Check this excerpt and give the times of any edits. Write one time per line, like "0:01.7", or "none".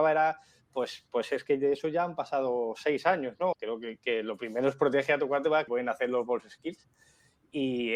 0:03.5
0:05.7